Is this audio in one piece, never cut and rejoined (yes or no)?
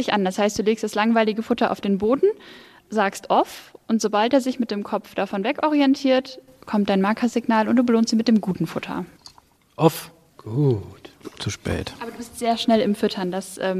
yes